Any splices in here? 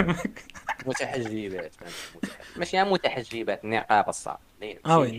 no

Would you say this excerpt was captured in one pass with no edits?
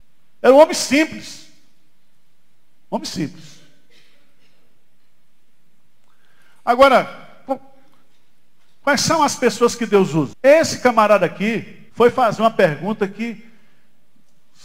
no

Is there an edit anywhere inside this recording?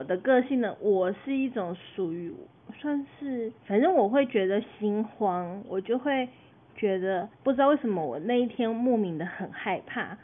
yes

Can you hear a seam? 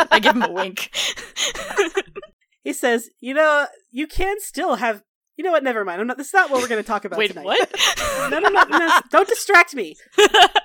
no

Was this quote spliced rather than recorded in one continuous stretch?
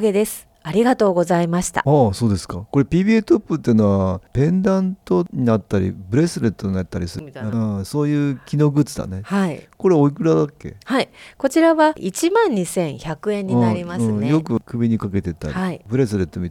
no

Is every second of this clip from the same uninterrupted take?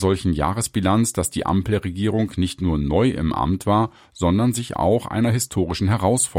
yes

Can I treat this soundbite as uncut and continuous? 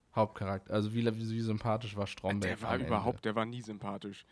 no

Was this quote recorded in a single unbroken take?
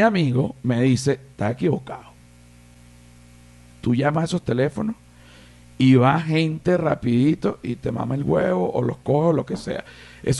yes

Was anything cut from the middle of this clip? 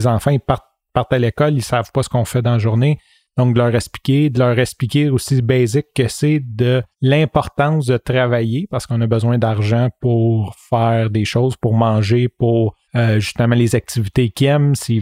yes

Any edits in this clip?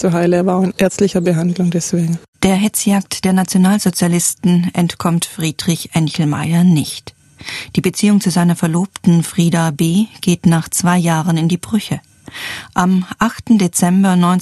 no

